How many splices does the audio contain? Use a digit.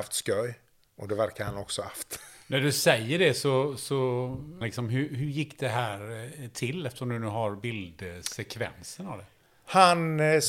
1